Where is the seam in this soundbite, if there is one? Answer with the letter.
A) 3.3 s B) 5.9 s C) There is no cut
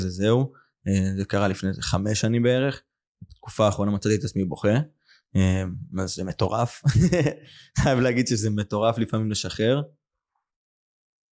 A